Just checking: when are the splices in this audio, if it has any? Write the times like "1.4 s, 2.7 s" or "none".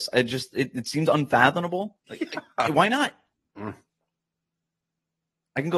2.1 s, 3.5 s